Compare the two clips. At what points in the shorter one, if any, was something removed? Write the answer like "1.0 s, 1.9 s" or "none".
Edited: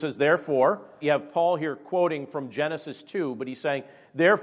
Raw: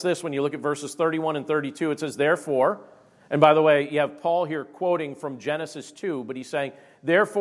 1.0 s